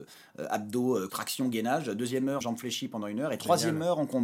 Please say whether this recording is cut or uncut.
cut